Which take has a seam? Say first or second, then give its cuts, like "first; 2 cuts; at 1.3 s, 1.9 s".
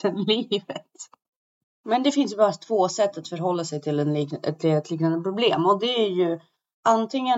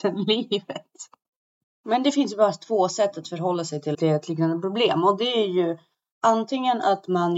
second; 1 cut; at 3.9 s